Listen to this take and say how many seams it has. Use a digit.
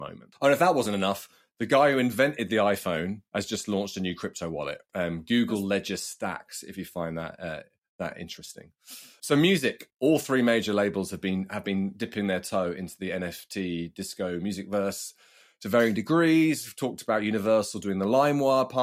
0